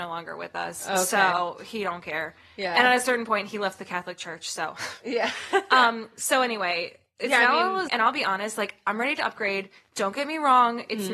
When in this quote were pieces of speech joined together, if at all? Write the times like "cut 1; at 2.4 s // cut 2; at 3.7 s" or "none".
cut 1; at 7.9 s